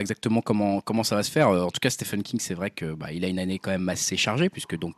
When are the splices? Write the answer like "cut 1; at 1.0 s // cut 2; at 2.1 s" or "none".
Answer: none